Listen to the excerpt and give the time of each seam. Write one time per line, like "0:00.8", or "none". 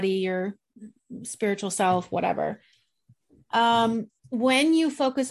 0:04.2

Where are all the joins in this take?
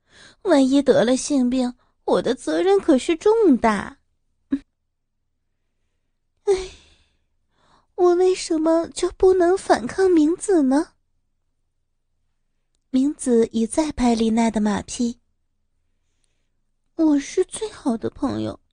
0:04.6
0:12.8

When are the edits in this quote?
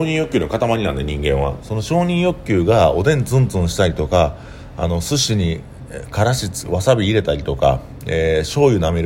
none

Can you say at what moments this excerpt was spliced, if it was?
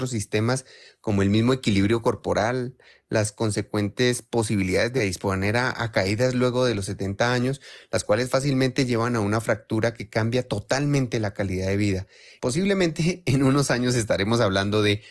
0:12.4

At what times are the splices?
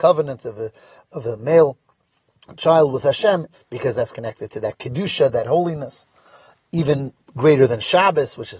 0:03.5

